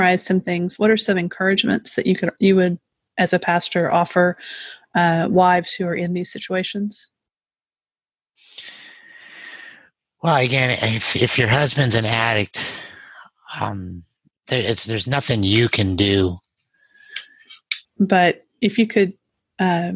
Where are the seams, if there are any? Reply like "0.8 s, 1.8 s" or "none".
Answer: 17.8 s